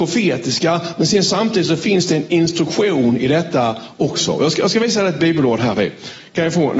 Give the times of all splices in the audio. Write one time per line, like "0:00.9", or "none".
none